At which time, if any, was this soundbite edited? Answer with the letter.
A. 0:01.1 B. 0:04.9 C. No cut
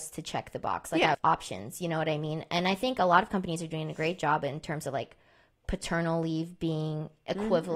A